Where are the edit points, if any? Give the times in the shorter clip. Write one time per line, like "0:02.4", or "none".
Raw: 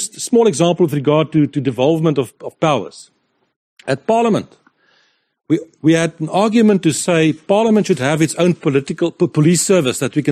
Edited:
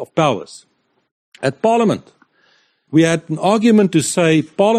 0:02.9